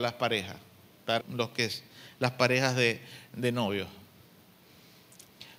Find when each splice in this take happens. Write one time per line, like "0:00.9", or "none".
0:01.2

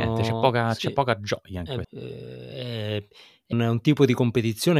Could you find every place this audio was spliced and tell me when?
0:01.8
0:03.5

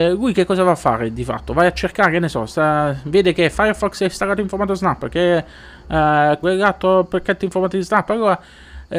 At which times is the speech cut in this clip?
0:06.4

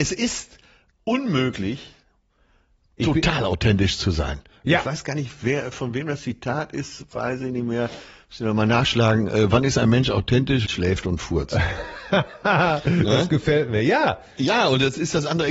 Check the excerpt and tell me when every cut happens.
0:10.7

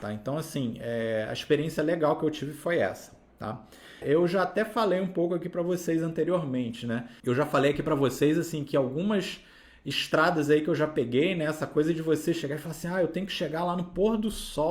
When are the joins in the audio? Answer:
0:04.0
0:07.2

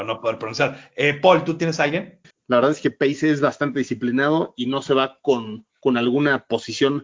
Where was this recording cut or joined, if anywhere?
0:02.3

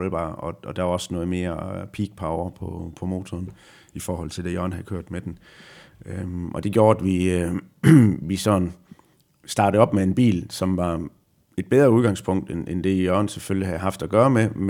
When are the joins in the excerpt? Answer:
none

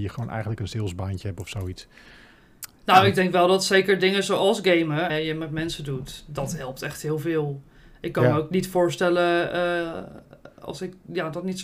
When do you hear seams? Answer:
0:05.1

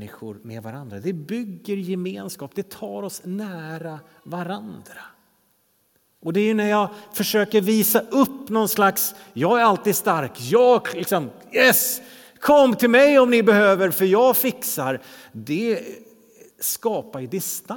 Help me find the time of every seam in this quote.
none

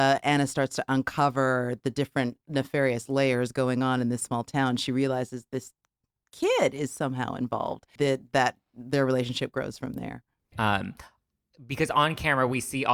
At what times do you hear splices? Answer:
0:08.0
0:10.5

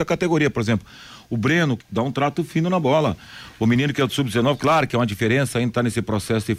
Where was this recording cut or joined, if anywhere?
0:01.8

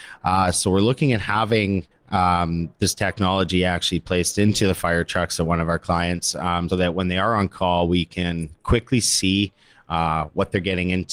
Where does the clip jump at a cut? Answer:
0:06.7

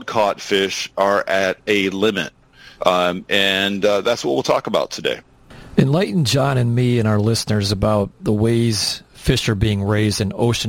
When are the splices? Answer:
0:02.8

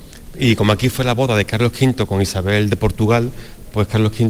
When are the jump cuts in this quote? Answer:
none

